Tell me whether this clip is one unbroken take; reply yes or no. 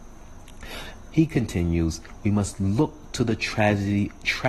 no